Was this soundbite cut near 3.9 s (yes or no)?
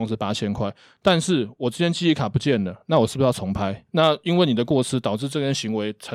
yes